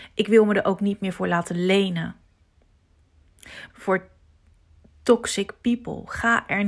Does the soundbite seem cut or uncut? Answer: cut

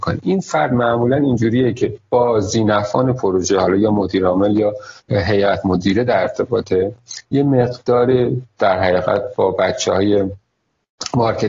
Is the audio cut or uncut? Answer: cut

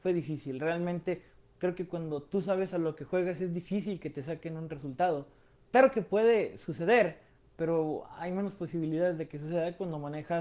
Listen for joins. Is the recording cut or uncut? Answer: uncut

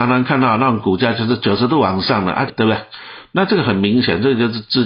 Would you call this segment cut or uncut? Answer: cut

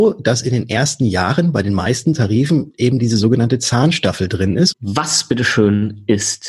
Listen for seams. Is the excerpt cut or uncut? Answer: cut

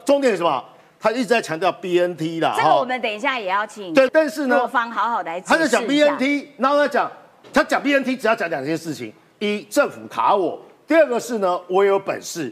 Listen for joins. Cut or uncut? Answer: cut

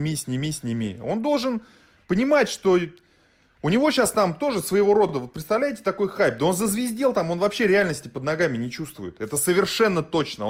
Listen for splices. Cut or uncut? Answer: uncut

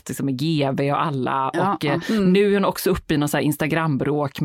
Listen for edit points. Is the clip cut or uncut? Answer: uncut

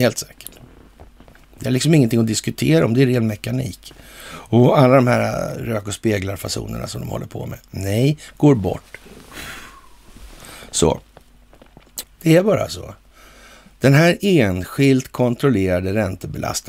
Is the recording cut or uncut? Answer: cut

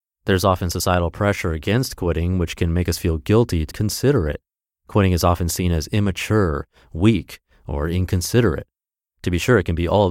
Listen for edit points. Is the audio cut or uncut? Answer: cut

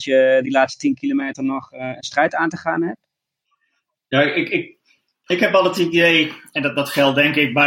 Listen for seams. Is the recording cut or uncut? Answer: uncut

